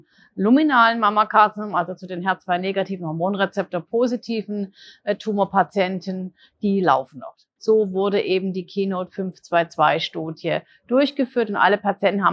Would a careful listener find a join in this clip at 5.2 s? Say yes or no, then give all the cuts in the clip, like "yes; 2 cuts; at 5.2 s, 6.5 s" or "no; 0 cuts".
no; 1 cut; at 7.6 s